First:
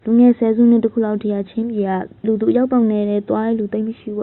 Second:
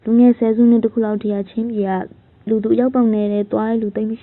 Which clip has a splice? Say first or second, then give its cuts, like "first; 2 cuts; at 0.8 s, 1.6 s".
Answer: first; 1 cut; at 2.2 s